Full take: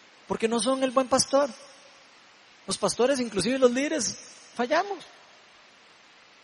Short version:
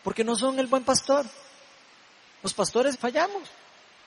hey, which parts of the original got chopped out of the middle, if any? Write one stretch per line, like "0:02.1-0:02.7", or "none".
0:03.2-0:04.5